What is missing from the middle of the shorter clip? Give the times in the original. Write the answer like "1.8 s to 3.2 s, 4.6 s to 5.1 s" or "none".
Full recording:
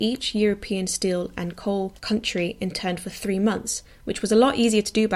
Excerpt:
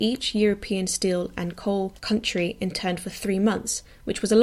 none